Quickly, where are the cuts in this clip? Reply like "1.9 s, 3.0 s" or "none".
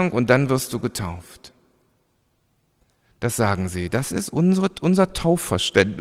none